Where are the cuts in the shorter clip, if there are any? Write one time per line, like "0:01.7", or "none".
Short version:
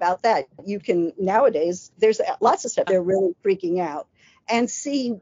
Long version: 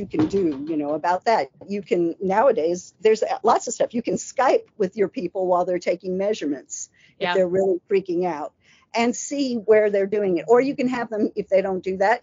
0:02.9